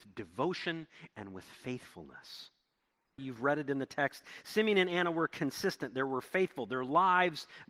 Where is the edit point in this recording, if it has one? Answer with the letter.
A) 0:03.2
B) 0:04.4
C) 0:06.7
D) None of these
A